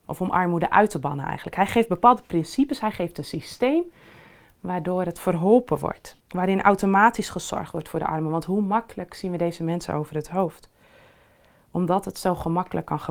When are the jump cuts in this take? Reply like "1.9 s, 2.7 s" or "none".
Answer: 6.2 s